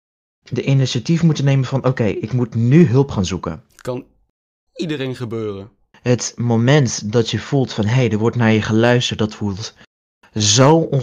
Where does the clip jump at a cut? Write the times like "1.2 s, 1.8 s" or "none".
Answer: 5.9 s